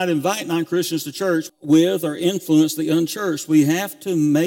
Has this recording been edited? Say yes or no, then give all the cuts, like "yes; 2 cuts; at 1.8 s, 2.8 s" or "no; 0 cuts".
yes; 1 cut; at 1.5 s